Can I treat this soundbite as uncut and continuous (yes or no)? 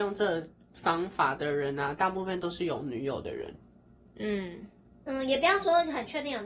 yes